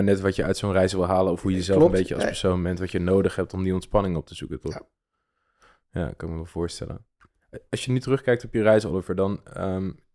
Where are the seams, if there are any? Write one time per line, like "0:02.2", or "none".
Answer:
none

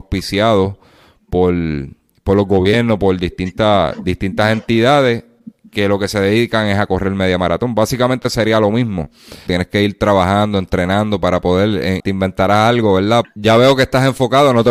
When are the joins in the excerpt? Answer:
0:09.5
0:12.0
0:13.2

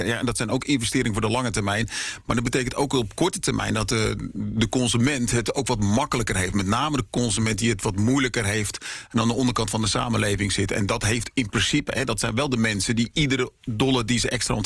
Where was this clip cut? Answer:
none

